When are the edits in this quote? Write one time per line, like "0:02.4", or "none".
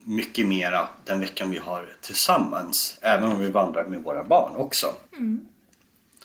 0:05.1